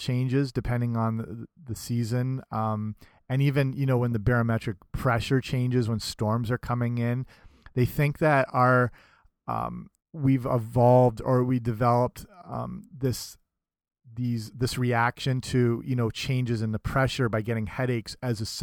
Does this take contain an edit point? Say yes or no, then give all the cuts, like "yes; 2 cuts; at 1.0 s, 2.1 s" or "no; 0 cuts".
yes; 1 cut; at 10.0 s